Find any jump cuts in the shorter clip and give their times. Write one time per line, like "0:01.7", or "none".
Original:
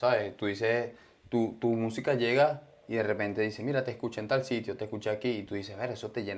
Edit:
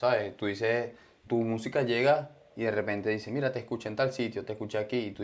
0:01.3